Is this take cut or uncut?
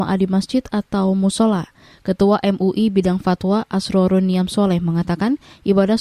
uncut